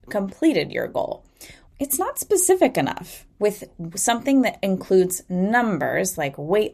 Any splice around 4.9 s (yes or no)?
no